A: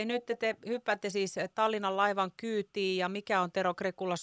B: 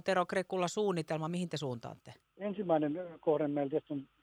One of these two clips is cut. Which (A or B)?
B